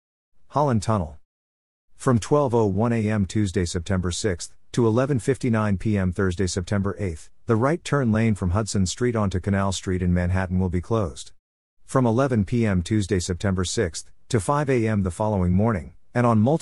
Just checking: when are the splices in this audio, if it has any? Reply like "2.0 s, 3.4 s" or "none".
none